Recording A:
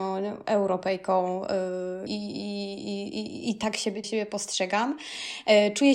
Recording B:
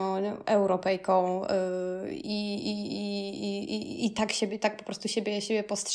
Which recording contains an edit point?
A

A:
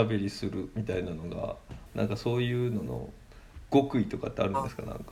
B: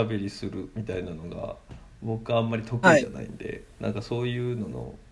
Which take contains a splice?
A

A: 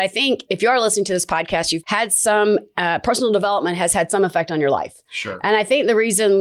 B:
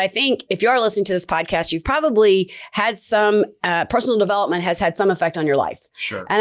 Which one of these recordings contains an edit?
A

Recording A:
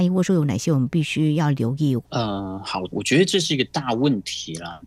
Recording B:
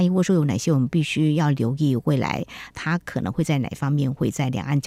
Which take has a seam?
A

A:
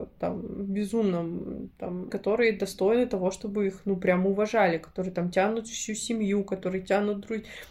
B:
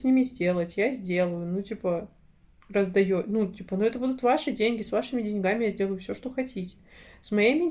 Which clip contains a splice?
A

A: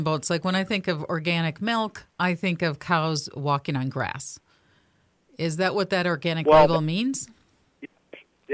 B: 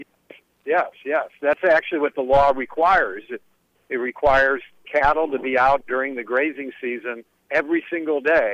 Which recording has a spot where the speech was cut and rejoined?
B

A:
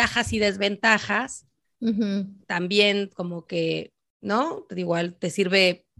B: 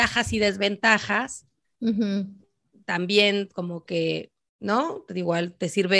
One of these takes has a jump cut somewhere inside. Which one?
A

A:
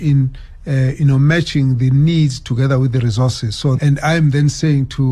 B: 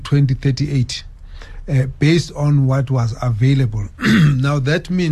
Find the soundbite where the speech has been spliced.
A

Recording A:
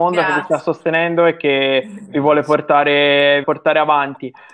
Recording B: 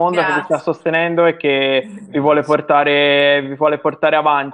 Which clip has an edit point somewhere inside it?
A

